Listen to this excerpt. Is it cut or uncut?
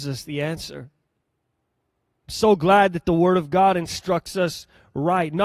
cut